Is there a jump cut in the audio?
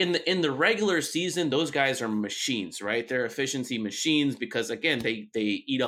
no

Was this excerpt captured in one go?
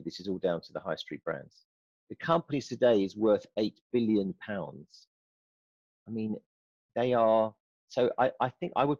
no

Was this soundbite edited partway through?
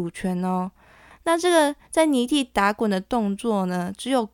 yes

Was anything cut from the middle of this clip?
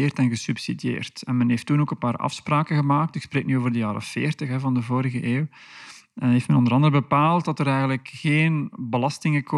no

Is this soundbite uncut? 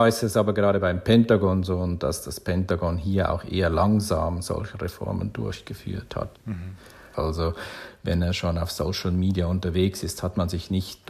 no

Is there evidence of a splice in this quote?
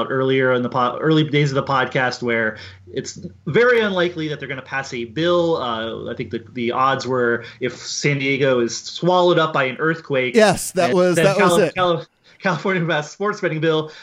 no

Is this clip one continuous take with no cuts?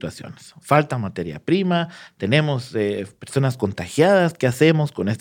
yes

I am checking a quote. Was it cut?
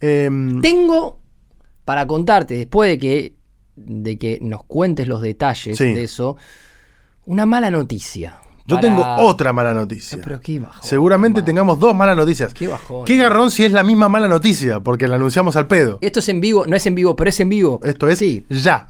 yes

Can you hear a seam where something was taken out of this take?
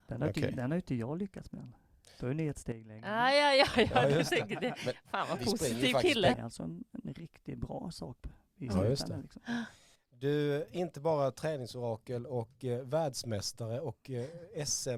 yes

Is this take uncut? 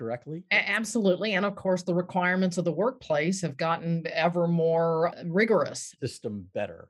no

